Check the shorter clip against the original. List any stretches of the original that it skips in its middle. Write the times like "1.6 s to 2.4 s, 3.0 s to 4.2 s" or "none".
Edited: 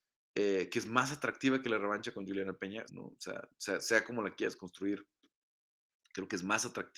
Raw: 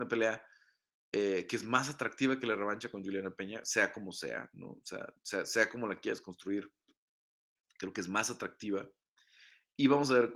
3.6 s to 4.5 s